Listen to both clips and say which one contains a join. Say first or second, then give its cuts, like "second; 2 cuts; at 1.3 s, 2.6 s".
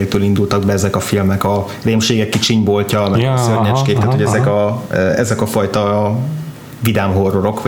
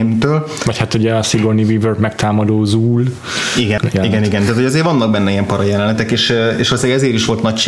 second; 1 cut; at 3.8 s